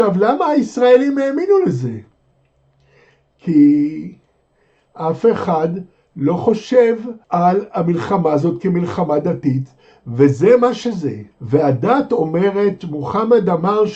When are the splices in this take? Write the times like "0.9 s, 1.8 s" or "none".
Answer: 7.2 s, 11.3 s